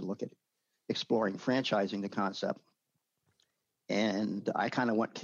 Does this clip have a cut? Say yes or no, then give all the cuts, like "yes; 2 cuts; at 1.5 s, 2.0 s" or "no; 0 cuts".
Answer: no; 0 cuts